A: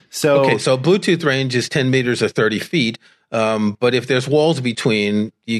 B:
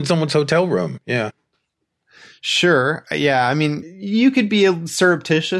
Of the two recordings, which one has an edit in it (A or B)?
B